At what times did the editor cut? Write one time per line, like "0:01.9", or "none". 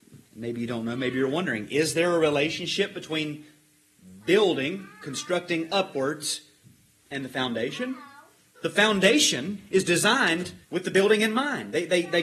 0:08.5
0:10.6